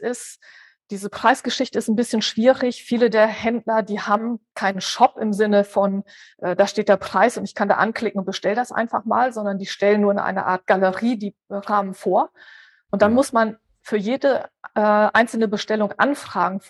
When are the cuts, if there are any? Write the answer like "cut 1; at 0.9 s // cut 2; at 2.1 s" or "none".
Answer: none